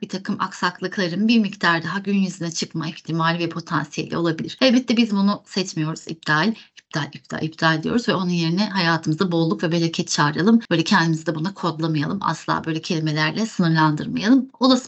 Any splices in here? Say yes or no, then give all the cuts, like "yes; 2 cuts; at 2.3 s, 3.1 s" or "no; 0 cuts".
no; 0 cuts